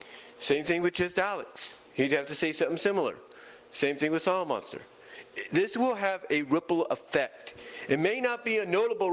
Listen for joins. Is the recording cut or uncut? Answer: uncut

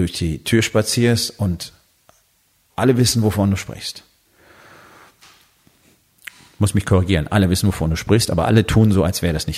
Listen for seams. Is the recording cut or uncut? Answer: uncut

